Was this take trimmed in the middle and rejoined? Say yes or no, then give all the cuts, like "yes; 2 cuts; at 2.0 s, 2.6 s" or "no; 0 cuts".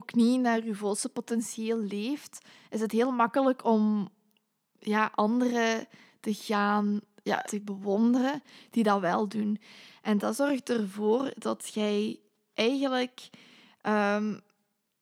yes; 1 cut; at 7.4 s